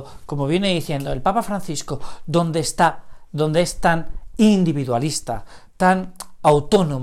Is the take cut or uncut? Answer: uncut